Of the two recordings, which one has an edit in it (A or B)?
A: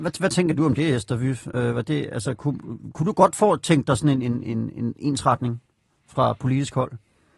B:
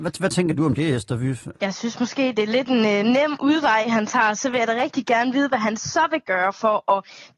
B